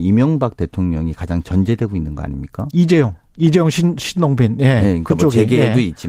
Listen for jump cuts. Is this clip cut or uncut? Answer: uncut